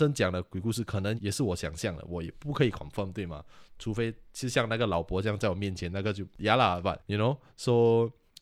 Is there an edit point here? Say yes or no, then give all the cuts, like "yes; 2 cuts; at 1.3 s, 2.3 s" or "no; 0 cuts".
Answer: yes; 1 cut; at 7.0 s